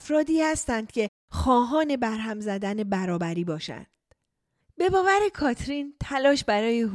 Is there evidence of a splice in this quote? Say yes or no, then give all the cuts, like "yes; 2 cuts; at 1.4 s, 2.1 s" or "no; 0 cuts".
yes; 1 cut; at 4.6 s